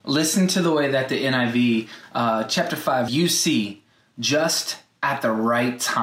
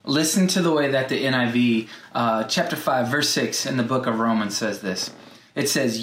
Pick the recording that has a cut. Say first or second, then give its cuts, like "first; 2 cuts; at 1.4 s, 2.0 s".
first; 1 cut; at 3.1 s